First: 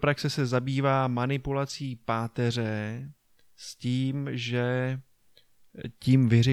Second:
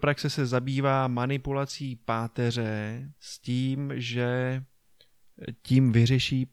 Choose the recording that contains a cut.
second; 1 cut; at 3.2 s

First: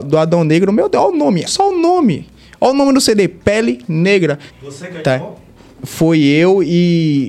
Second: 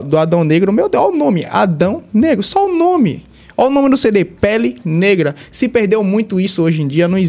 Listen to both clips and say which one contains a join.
first; 2 cuts; at 1.5 s, 4.5 s

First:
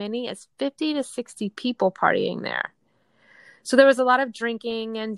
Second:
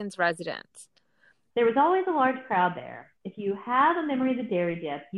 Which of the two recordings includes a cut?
second; 1 cut; at 1.5 s

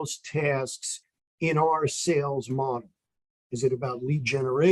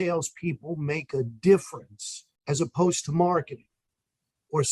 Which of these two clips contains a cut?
second; 1 cut; at 2.4 s

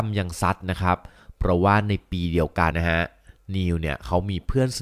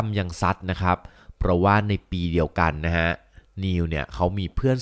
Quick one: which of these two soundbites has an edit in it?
first; 1 cut; at 2.7 s

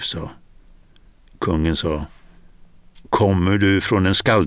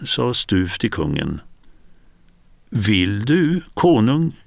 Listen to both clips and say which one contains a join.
first; 1 cut; at 1.3 s

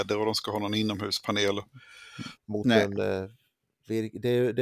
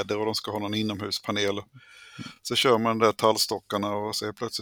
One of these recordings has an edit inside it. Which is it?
first; 1 cut; at 2.4 s

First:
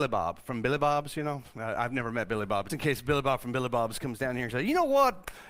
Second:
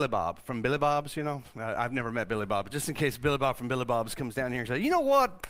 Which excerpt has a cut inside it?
first; 1 cut; at 2.7 s

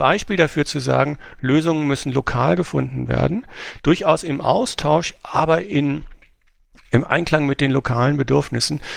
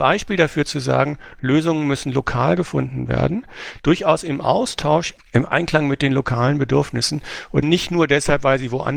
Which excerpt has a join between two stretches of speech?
second; 2 cuts; at 5.2 s, 7.6 s

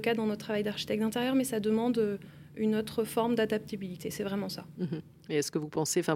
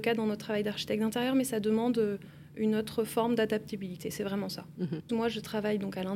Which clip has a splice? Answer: second; 1 cut; at 5.1 s

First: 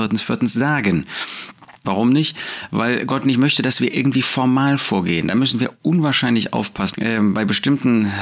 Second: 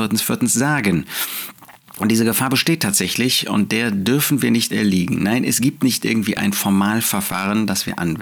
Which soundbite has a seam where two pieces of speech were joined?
first; 2 cuts; at 1.8 s, 6.9 s

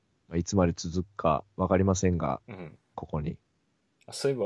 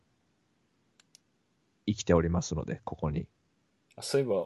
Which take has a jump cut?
first; 1 cut; at 2.9 s

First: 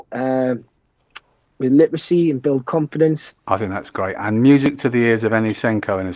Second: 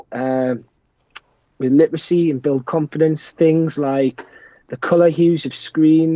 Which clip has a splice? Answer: first; 1 cut; at 3.3 s

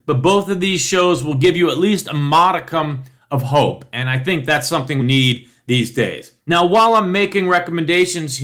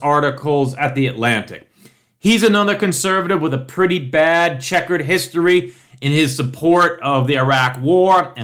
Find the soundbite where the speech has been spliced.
first; 2 cuts; at 5.0 s, 6.4 s

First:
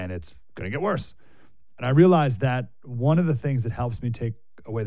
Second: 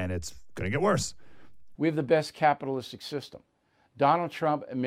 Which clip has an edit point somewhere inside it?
second; 1 cut; at 1.7 s

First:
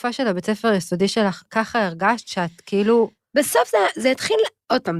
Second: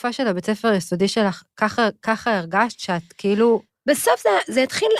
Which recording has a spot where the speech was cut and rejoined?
first; 1 cut; at 1.5 s

